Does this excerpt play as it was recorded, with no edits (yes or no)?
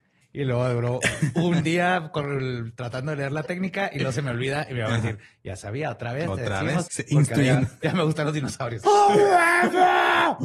no